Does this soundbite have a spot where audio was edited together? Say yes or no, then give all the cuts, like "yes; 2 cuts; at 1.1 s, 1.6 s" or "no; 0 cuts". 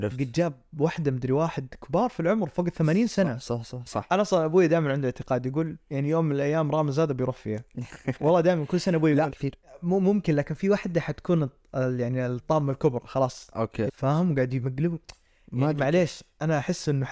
yes; 3 cuts; at 3.9 s, 9.3 s, 13.9 s